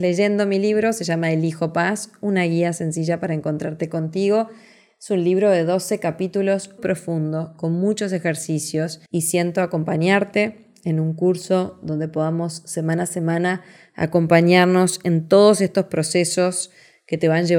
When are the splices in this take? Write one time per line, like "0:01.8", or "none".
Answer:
0:06.8
0:09.1